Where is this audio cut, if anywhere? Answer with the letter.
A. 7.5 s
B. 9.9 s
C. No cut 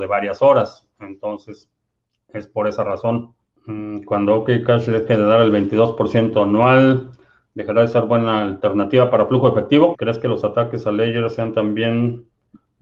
B